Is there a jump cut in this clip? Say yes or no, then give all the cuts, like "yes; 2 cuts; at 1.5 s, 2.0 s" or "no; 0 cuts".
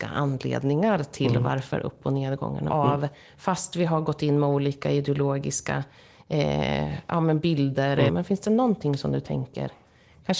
yes; 2 cuts; at 2.7 s, 8.1 s